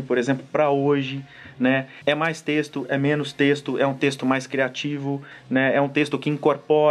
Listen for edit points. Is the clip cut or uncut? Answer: cut